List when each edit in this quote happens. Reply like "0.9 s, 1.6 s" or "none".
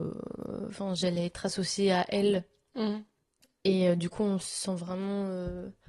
none